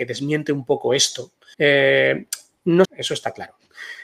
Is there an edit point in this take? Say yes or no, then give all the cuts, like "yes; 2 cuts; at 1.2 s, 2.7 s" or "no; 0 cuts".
yes; 2 cuts; at 1.5 s, 2.8 s